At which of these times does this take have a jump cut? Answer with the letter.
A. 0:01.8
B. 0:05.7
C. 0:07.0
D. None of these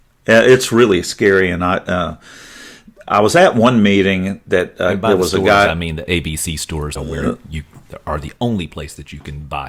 C